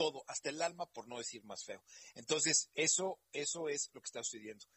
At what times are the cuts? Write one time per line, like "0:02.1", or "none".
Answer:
none